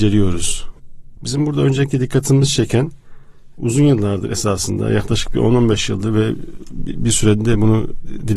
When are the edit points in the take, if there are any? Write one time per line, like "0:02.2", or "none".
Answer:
0:01.2